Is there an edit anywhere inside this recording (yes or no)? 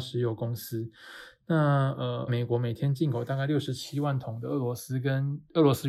yes